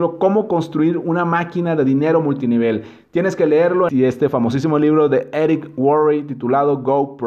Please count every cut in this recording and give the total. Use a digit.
1